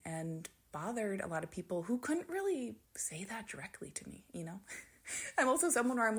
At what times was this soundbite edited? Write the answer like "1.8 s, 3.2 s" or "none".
2.8 s